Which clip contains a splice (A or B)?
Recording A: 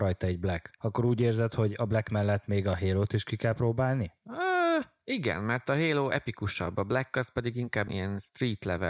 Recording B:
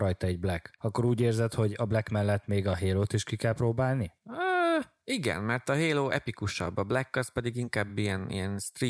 A